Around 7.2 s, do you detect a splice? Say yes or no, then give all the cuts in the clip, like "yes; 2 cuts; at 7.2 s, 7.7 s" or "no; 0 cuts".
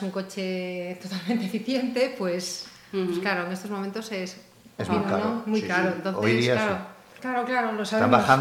yes; 1 cut; at 7.2 s